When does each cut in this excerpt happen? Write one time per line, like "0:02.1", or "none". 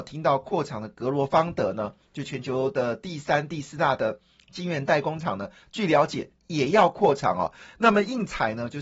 none